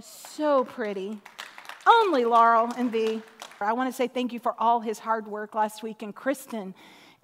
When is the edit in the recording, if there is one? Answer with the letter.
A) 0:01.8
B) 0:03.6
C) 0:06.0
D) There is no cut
B